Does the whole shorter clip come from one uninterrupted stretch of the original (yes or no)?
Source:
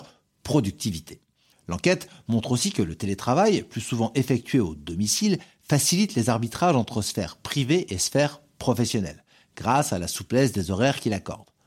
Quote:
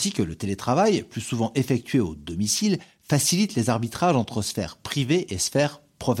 yes